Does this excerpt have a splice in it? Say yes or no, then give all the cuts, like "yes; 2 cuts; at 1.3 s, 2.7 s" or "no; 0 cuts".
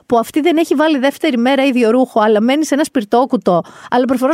no; 0 cuts